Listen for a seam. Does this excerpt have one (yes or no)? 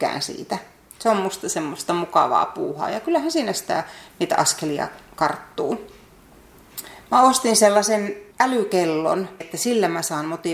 yes